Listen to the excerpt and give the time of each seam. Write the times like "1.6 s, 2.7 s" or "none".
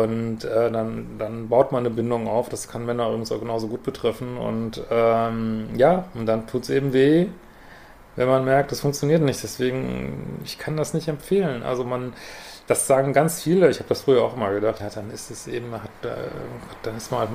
14.8 s